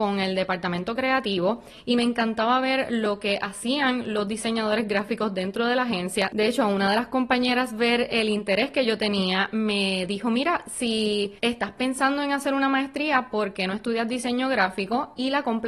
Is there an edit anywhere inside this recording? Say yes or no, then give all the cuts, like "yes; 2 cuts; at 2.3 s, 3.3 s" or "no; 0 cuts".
no; 0 cuts